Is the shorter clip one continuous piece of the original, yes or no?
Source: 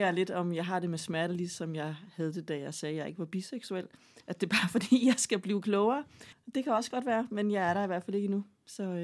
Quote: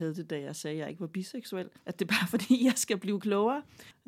no